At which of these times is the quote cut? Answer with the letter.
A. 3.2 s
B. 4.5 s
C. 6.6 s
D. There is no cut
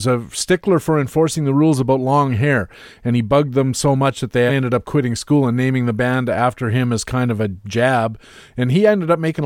B